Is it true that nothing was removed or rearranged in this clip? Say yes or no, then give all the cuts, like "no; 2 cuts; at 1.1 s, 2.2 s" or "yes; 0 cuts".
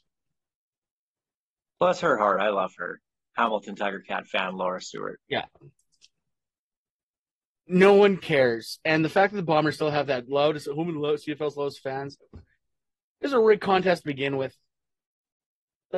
no; 1 cut; at 12.2 s